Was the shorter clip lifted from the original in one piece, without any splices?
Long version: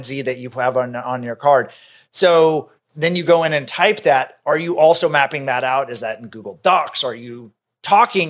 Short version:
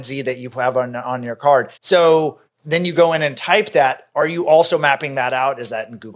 no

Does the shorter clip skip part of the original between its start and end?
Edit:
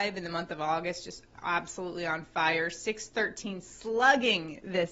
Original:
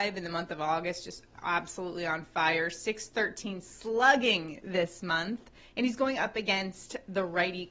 no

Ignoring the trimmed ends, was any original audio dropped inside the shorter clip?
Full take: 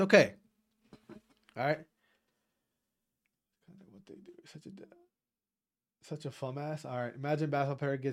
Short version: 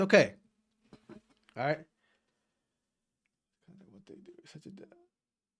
no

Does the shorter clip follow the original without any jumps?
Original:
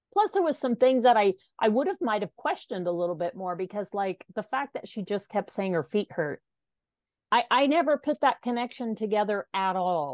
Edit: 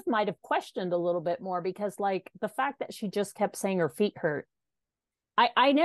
yes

